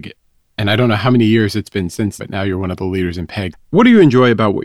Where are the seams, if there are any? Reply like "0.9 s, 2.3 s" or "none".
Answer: 2.2 s, 3.5 s